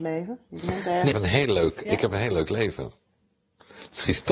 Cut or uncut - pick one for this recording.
cut